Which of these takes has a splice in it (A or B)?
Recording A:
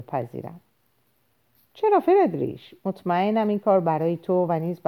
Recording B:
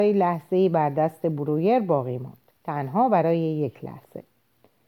B